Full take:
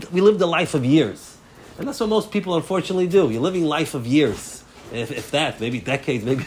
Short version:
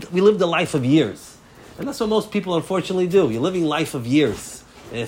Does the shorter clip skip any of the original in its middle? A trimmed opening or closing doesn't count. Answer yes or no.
no